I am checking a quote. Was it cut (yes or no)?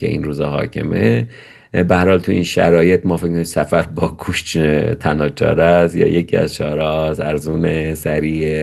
no